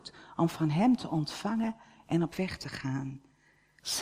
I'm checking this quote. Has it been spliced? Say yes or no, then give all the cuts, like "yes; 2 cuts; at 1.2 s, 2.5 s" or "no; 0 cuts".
no; 0 cuts